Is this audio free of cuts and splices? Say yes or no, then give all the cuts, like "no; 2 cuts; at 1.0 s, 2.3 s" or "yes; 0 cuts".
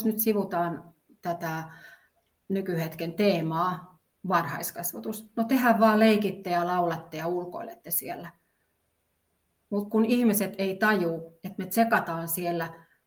yes; 0 cuts